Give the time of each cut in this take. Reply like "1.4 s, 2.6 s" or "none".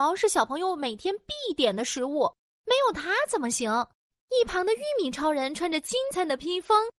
4.1 s, 6.1 s